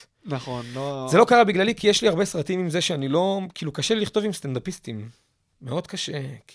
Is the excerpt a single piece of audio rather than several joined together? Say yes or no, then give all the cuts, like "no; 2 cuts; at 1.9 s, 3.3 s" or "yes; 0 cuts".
yes; 0 cuts